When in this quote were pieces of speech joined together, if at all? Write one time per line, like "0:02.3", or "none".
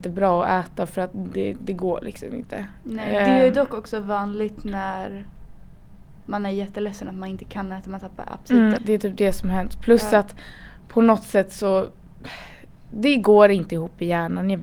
0:08.8